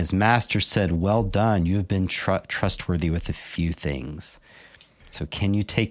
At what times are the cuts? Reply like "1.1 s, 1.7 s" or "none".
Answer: none